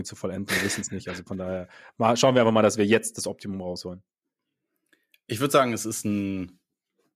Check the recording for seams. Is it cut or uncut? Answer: uncut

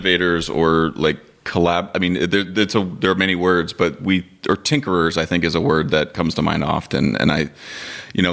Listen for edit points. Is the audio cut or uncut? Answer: uncut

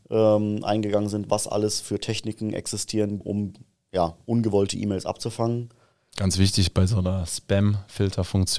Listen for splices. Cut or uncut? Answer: cut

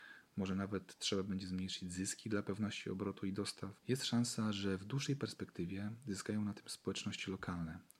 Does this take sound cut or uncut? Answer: cut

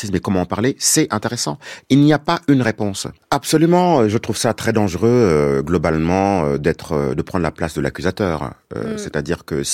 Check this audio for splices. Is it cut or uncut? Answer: cut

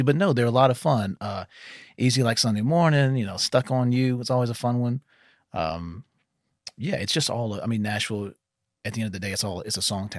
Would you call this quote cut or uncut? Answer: uncut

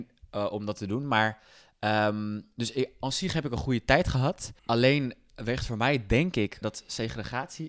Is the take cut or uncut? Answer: cut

